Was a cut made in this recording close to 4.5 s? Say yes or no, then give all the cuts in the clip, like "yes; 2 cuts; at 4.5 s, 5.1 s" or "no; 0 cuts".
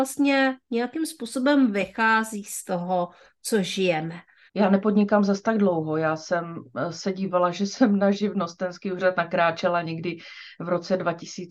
yes; 1 cut; at 4.5 s